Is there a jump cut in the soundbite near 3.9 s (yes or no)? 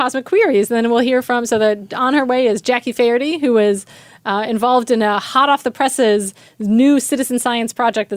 no